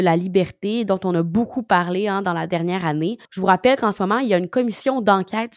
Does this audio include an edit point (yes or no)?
yes